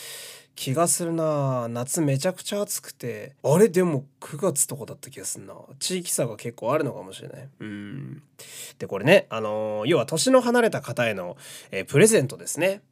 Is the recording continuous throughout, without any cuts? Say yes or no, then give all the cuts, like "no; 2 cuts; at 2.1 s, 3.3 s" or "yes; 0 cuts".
no; 1 cut; at 3.4 s